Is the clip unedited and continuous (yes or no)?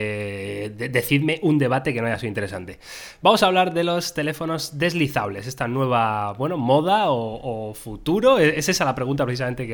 yes